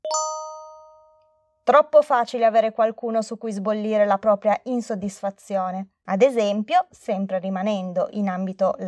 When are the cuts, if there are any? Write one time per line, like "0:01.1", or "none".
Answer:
0:06.0